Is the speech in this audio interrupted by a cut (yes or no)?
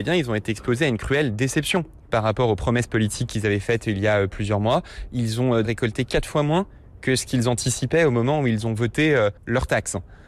yes